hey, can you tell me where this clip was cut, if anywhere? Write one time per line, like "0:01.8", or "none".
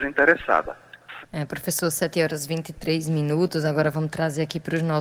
0:01.2